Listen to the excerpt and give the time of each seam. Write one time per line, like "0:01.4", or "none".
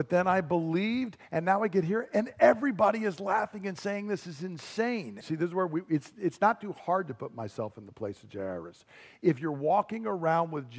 0:05.2